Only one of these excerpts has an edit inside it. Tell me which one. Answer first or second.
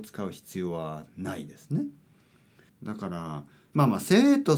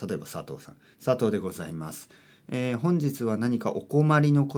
first